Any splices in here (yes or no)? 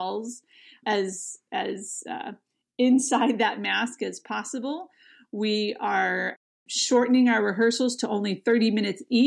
no